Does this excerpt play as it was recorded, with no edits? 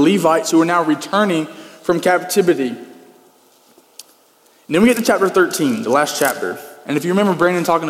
yes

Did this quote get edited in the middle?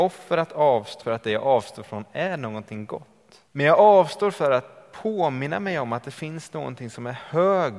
yes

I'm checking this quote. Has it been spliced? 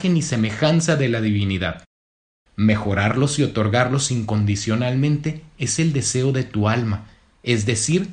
yes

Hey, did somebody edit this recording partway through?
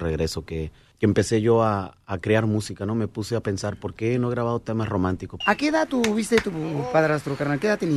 yes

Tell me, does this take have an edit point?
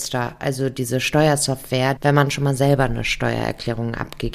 yes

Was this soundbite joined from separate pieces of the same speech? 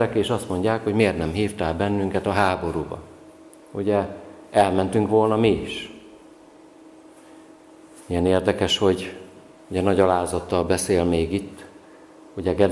no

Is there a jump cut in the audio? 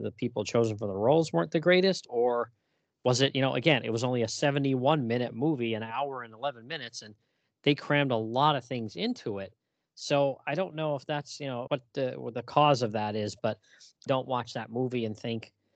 yes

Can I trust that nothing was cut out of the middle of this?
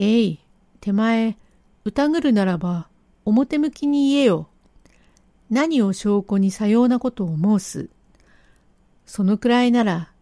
yes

